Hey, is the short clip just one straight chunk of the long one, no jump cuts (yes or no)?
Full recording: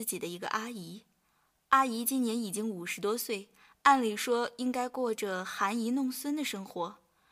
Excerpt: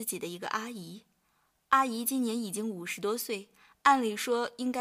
yes